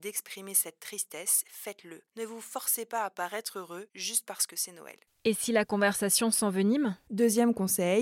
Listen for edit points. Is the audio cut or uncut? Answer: uncut